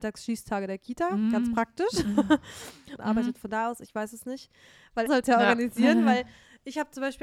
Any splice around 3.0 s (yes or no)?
yes